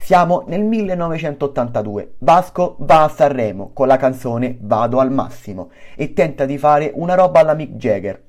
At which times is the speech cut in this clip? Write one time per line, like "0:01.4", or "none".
none